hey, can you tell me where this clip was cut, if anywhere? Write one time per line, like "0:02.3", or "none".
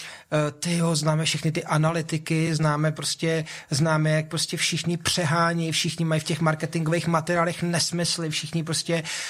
none